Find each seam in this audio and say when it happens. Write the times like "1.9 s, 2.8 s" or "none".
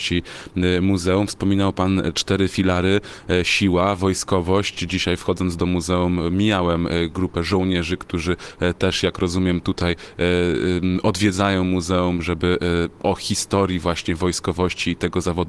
none